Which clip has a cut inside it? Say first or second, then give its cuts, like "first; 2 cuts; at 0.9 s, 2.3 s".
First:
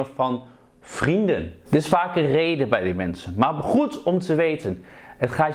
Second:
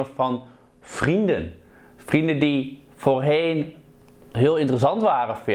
first; 1 cut; at 1.7 s